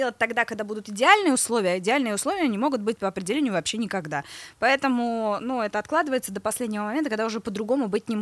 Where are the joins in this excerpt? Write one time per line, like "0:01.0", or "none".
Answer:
none